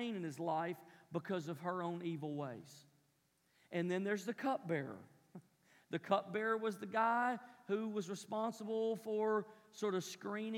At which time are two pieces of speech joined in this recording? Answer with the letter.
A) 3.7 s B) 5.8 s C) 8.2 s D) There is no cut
D